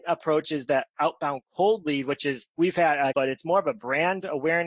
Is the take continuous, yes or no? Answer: no